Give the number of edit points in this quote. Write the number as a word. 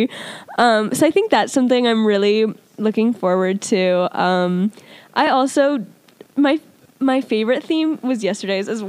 zero